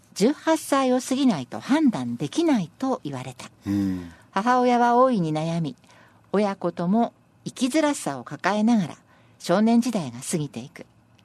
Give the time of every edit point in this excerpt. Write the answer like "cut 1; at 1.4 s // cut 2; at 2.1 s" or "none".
none